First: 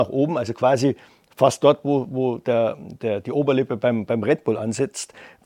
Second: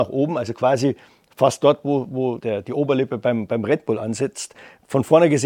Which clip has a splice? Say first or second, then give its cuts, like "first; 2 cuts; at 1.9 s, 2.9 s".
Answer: second; 1 cut; at 2.4 s